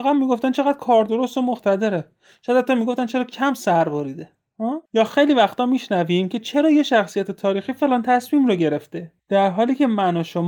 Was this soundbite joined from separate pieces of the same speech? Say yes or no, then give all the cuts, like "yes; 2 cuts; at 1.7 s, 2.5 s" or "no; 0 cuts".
yes; 1 cut; at 4.9 s